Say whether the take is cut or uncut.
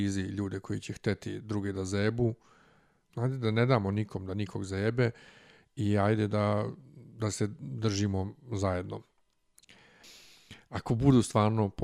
cut